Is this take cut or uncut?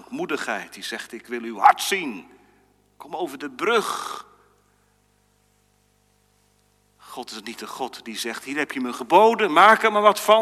uncut